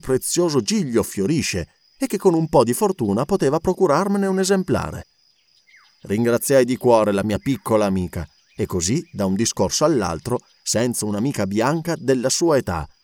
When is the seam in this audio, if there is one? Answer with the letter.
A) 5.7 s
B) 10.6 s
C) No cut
B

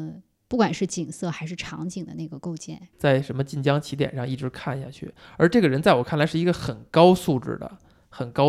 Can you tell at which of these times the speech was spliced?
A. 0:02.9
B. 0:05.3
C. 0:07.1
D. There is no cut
A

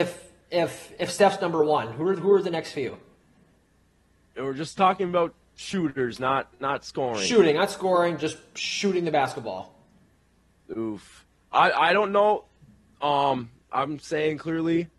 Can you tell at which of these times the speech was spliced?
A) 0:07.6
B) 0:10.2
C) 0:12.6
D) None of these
D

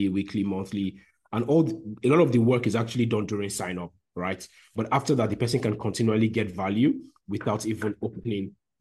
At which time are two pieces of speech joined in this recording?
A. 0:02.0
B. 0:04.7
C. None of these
C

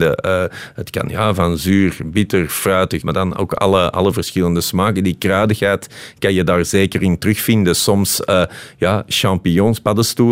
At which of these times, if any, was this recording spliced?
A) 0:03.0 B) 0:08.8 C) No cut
A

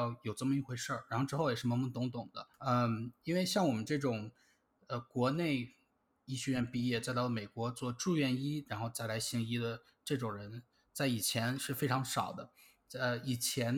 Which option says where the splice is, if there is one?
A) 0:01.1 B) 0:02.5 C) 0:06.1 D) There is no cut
B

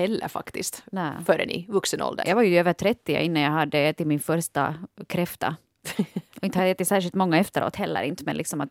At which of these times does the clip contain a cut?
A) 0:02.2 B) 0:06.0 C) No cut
A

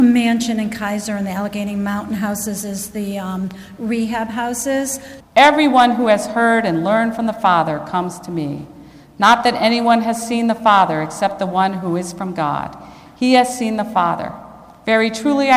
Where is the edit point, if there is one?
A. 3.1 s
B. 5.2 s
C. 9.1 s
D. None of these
B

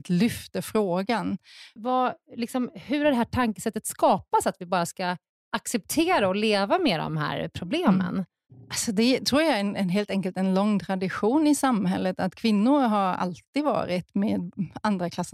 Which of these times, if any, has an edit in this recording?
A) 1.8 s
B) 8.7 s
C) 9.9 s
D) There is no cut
A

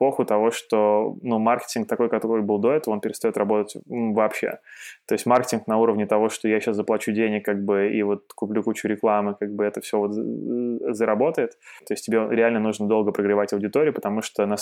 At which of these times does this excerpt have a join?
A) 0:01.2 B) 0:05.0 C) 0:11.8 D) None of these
C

